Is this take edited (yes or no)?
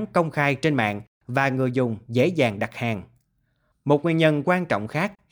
no